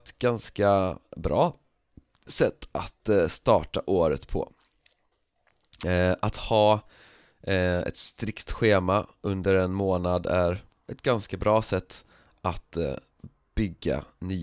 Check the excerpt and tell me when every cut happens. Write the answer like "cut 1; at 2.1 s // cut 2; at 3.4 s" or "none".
none